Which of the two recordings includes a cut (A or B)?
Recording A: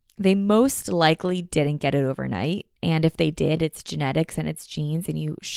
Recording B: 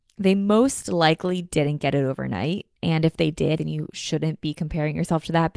B